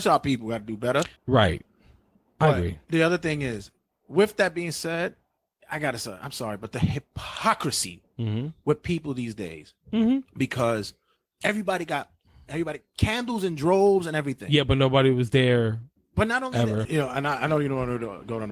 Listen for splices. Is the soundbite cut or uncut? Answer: cut